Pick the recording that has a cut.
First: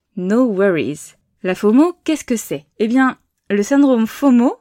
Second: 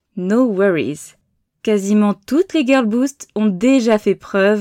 first; 2 cuts; at 1.4 s, 2.7 s

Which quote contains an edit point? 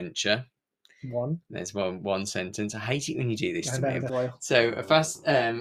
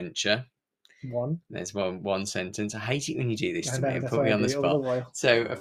first; 1 cut; at 4.1 s

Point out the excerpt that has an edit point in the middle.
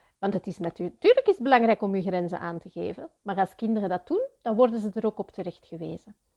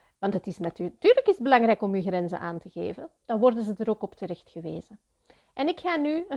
second; 1 cut; at 3.2 s

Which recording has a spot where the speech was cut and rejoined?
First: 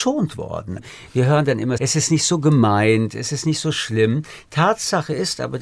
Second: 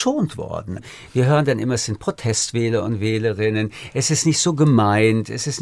first; 1 cut; at 1.8 s

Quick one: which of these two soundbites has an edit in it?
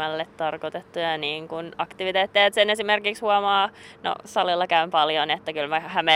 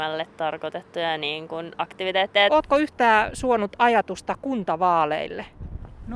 second; 1 cut; at 2.5 s

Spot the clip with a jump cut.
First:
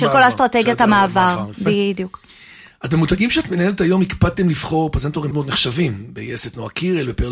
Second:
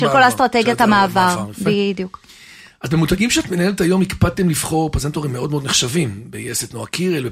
first; 1 cut; at 5.3 s

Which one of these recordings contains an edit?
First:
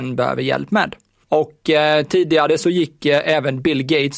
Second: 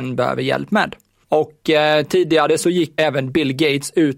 second; 1 cut; at 3.0 s

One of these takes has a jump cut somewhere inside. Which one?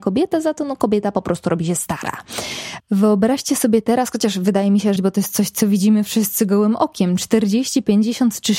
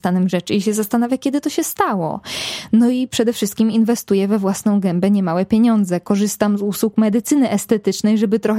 first; 2 cuts; at 2.8 s, 5.0 s

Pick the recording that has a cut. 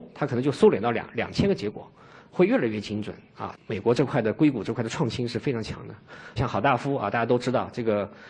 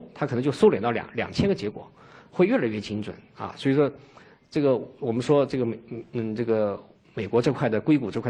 first; 2 cuts; at 3.5 s, 6.4 s

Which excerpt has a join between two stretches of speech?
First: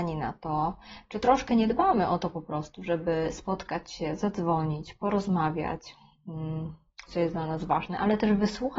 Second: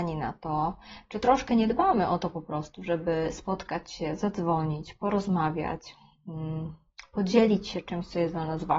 first; 1 cut; at 7.1 s

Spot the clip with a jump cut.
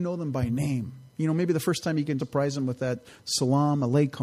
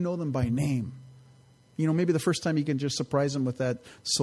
first; 2 cuts; at 1.1 s, 2.2 s

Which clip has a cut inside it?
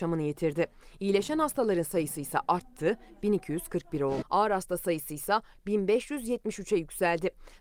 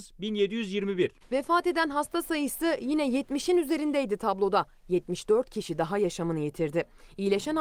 first; 1 cut; at 4.2 s

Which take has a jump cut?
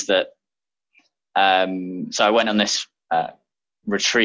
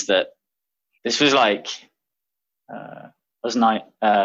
second; 1 cut; at 0.9 s

